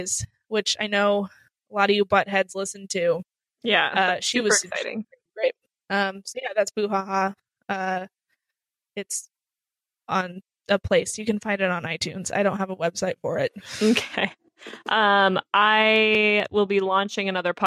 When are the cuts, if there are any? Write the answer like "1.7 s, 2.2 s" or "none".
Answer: none